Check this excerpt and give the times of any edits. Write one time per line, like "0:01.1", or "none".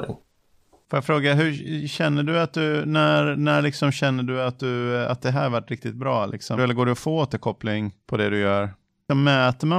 0:06.6